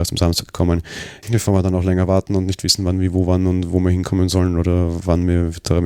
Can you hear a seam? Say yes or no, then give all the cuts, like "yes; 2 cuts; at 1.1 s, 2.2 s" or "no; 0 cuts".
yes; 1 cut; at 1.2 s